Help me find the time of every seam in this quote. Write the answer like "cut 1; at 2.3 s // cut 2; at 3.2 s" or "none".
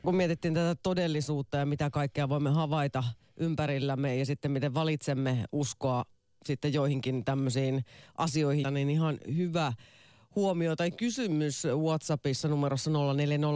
cut 1; at 8.6 s